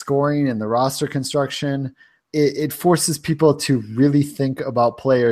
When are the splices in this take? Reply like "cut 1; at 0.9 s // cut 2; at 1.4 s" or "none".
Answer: cut 1; at 2.2 s